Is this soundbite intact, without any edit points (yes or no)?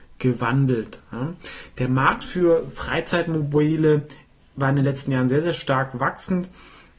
yes